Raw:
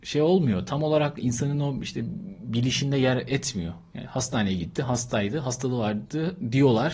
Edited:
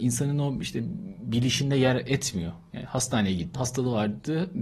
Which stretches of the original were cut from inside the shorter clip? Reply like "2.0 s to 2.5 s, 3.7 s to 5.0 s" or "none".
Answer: 4.7 s to 5.4 s